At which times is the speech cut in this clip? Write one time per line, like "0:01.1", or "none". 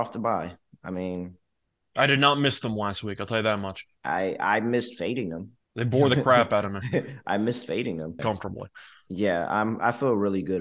0:04.0
0:05.6
0:08.2